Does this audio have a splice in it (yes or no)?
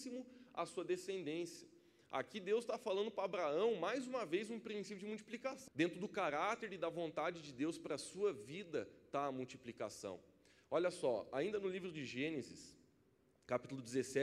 yes